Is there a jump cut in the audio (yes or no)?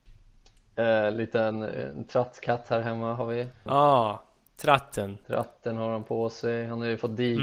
yes